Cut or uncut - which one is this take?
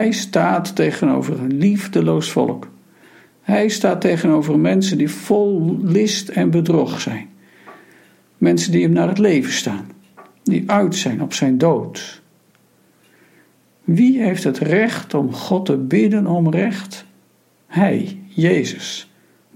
uncut